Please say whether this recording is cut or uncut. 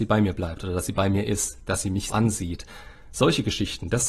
cut